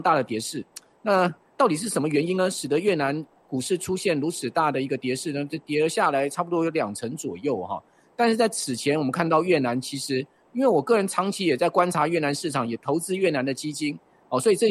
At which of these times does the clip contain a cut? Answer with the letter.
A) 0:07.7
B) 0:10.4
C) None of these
B